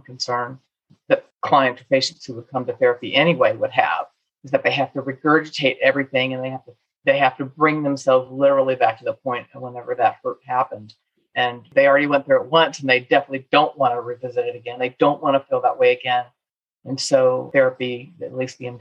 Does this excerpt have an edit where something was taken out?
no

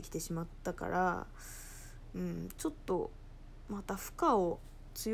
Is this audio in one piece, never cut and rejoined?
yes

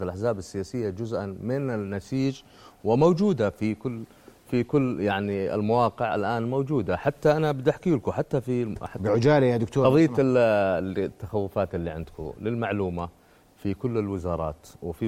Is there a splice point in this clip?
no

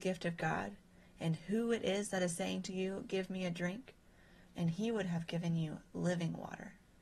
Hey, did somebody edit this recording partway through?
yes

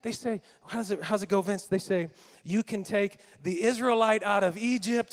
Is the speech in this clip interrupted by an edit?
no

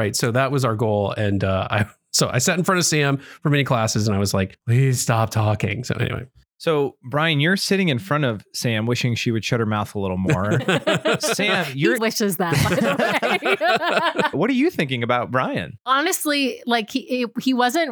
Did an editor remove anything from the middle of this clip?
yes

